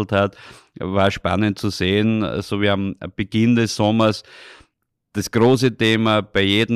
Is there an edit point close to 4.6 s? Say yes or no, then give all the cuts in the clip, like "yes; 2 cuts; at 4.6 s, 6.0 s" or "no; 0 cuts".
no; 0 cuts